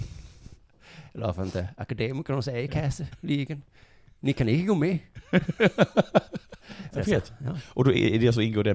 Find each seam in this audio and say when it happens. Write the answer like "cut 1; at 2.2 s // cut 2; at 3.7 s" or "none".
cut 1; at 6.9 s